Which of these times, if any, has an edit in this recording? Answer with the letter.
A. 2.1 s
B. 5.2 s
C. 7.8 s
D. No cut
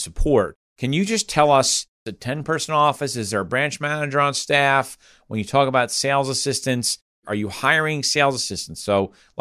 A